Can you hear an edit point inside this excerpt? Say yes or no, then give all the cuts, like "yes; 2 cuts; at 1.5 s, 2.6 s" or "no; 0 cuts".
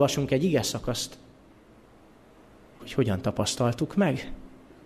yes; 1 cut; at 2.8 s